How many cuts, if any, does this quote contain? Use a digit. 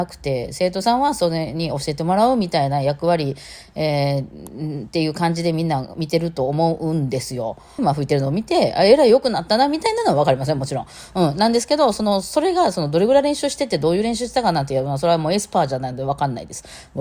1